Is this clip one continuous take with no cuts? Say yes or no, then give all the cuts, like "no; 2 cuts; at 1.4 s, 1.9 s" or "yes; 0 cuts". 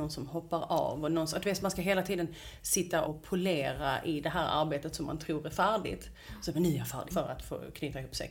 no; 2 cuts; at 3.1 s, 7.1 s